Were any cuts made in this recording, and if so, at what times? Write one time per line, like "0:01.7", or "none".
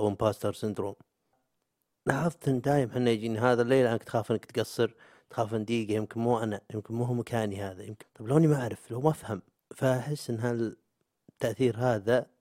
0:08.0